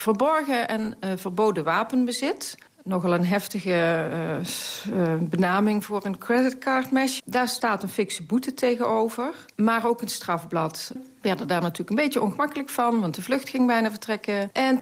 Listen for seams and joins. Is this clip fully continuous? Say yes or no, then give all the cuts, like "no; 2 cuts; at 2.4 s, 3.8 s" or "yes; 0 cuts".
no; 2 cuts; at 7.2 s, 11.0 s